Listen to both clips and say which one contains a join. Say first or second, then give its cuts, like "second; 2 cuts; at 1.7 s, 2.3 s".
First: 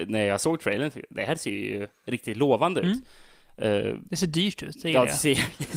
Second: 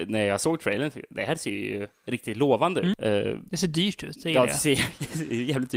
second; 1 cut; at 2.9 s